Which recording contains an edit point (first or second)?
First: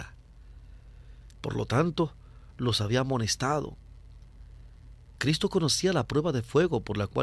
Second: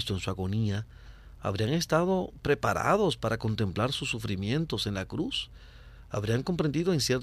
first